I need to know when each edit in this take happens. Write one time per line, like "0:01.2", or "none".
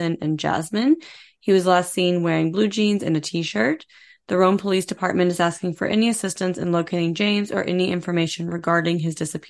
none